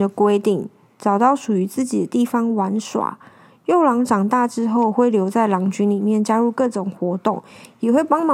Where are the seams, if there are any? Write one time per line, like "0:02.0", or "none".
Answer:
none